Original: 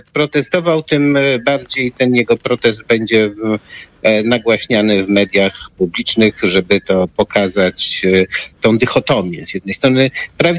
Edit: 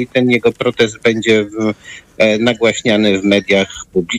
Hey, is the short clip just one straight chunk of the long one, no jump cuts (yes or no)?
yes